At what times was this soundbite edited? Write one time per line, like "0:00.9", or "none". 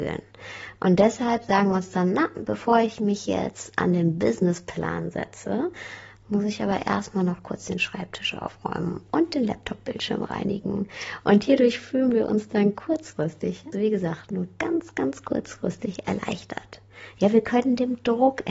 0:13.7